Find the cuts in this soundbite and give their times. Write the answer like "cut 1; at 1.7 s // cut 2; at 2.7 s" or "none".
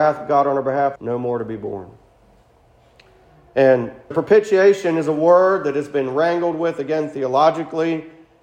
cut 1; at 1.0 s // cut 2; at 4.1 s